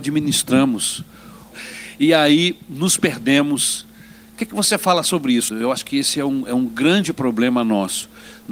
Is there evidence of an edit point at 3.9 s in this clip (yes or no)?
no